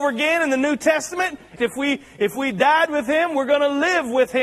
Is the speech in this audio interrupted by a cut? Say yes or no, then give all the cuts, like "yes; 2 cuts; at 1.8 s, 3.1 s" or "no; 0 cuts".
yes; 1 cut; at 1.6 s